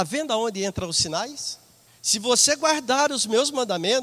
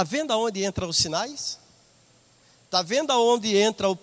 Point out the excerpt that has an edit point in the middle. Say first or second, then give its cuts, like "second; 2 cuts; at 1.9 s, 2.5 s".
first; 1 cut; at 1.9 s